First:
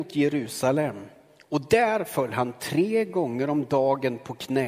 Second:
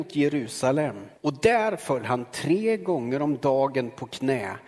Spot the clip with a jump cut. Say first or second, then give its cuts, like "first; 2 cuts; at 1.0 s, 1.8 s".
second; 1 cut; at 1.2 s